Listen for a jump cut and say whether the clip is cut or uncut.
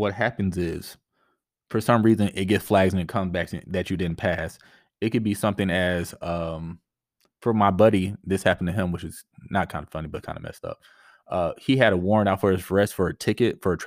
uncut